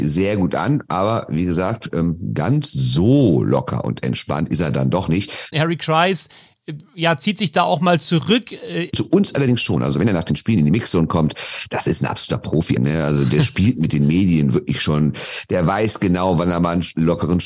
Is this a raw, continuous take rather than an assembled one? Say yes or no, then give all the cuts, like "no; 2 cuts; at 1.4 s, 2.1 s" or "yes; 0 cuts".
no; 3 cuts; at 5.5 s, 8.9 s, 12.8 s